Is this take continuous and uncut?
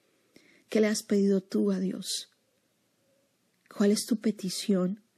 yes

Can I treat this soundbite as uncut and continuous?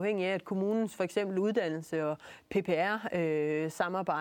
yes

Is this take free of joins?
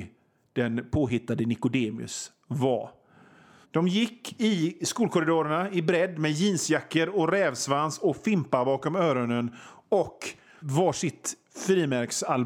no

